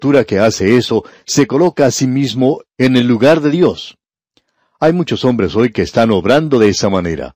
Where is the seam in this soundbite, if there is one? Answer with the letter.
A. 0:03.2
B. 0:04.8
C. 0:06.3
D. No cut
D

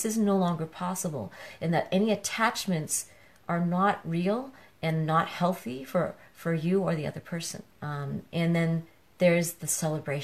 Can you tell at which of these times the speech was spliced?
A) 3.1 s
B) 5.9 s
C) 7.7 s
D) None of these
C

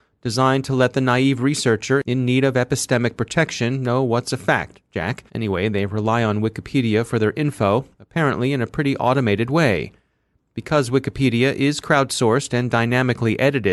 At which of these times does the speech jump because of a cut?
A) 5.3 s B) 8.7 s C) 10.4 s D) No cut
A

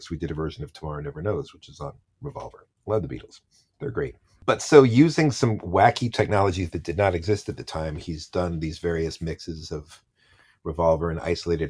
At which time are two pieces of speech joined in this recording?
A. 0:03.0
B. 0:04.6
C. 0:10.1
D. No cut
D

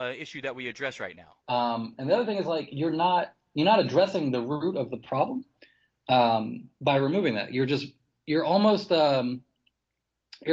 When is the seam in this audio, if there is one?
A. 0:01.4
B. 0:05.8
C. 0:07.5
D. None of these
A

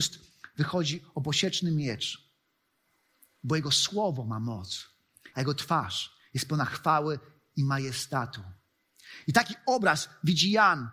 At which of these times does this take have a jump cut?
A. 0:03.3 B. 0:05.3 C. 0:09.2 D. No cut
B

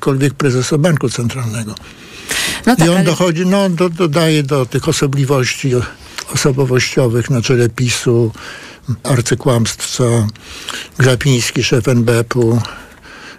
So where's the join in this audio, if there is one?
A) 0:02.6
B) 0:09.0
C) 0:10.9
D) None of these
B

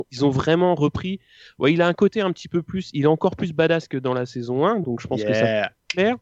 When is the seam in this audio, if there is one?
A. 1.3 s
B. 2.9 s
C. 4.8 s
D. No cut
D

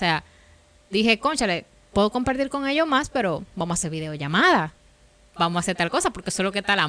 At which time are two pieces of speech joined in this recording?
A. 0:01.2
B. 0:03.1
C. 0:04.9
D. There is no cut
D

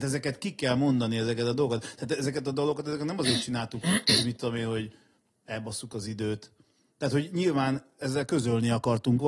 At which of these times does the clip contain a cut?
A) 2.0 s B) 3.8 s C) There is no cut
B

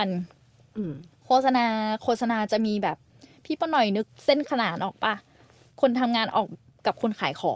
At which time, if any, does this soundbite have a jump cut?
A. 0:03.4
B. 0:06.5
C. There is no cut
B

